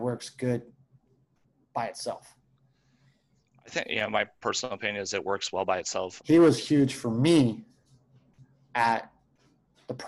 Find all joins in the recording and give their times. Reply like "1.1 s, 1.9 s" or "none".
6.2 s